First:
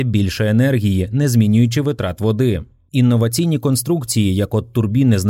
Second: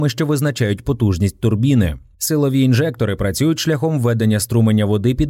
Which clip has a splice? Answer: first; 1 cut; at 2.9 s

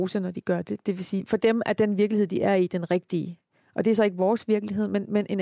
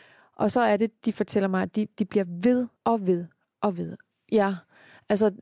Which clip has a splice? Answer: second; 2 cuts; at 2.7 s, 4.1 s

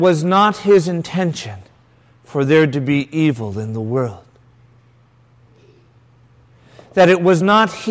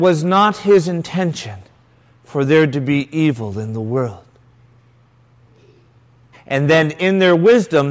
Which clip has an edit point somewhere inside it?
second; 1 cut; at 6.3 s

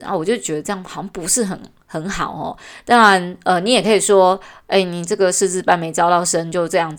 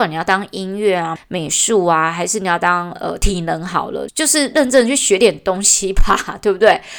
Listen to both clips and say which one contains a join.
second; 2 cuts; at 1.2 s, 4.1 s

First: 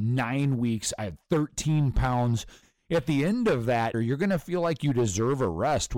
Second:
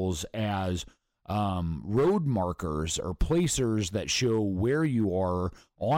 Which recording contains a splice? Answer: first; 2 cuts; at 2.6 s, 3.9 s

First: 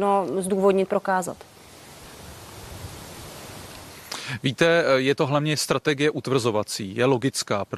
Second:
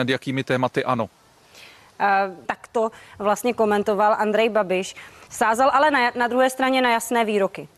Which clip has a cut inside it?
second; 1 cut; at 2.4 s

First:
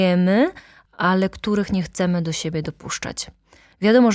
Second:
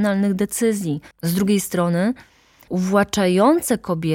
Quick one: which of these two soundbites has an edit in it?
second; 2 cuts; at 1.1 s, 2.7 s

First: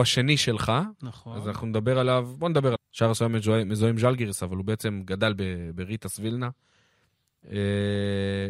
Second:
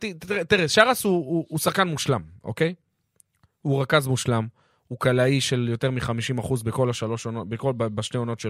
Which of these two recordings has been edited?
first; 1 cut; at 2.8 s

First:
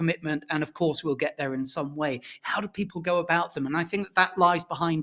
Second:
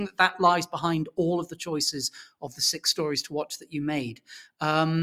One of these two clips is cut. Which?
first; 1 cut; at 2.4 s

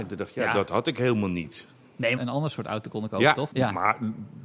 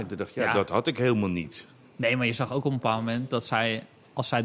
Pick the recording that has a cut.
first; 2 cuts; at 2.2 s, 3.5 s

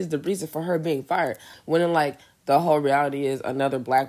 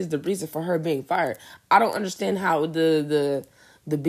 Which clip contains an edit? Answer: first; 1 cut; at 1.5 s

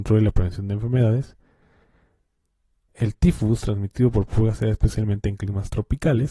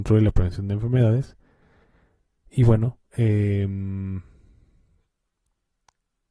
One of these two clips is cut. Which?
second; 1 cut; at 2.4 s

